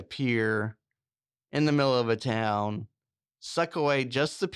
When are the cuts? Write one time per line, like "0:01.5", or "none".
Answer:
none